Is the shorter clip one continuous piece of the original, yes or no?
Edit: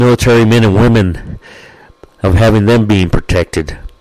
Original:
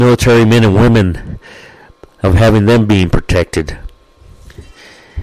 yes